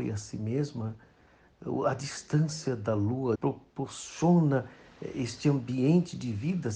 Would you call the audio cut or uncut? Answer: cut